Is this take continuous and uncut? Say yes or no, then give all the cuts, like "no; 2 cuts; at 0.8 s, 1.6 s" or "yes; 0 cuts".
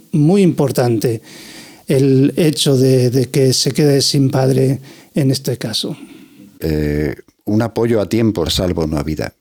no; 2 cuts; at 6.6 s, 8.5 s